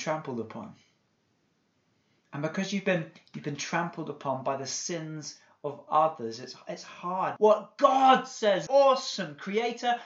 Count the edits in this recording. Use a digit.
2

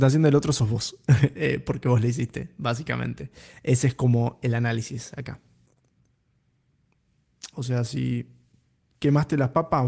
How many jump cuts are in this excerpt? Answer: 1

